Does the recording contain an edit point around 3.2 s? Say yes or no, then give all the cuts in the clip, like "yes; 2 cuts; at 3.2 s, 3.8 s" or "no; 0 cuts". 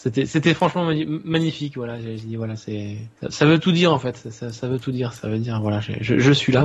yes; 1 cut; at 3.2 s